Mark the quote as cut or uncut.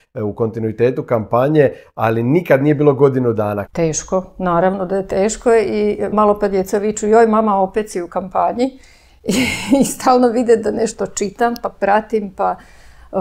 cut